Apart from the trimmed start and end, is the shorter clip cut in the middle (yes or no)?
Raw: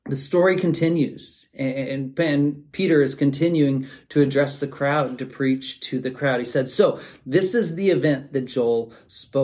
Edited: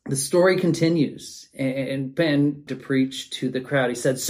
yes